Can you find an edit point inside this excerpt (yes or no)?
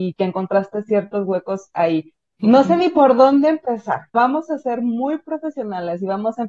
yes